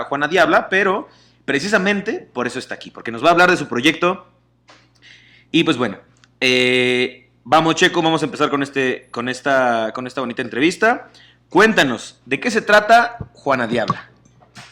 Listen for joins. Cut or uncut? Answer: uncut